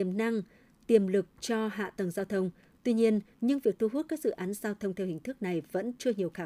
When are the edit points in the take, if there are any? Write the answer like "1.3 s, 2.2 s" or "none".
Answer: 3.3 s